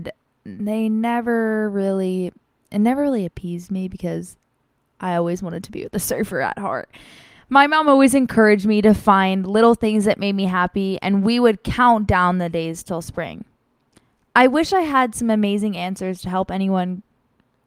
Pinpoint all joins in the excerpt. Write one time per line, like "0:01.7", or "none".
none